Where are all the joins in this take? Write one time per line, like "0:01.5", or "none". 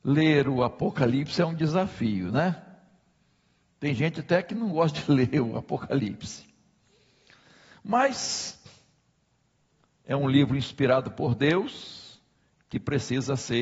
none